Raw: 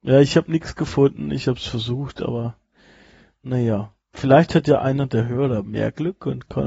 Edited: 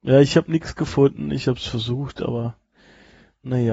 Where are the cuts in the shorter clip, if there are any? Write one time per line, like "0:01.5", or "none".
none